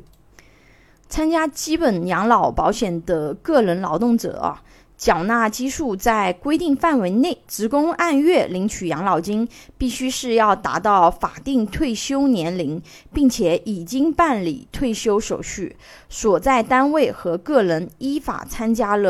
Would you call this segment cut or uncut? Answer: cut